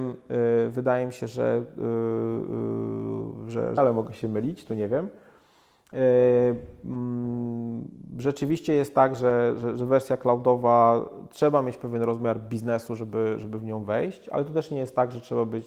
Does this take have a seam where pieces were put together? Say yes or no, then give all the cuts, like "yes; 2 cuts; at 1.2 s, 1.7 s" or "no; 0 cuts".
yes; 1 cut; at 3.8 s